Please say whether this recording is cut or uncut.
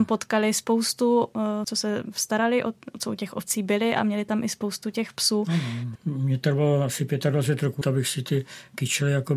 cut